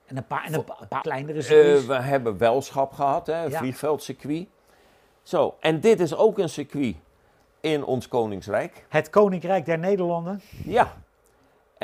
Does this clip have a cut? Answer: yes; 1 cut; at 1.0 s

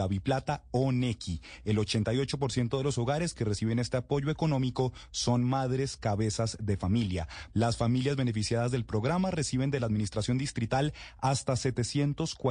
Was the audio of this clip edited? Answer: yes; 1 cut; at 7.5 s

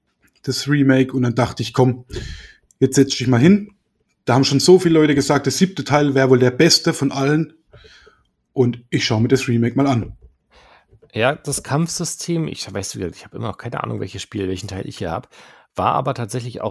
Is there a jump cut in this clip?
no; 0 cuts

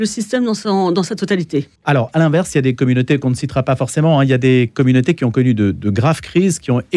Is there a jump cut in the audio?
yes; 1 cut; at 1.8 s

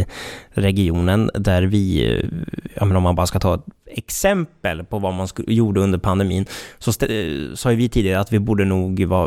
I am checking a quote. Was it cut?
no; 0 cuts

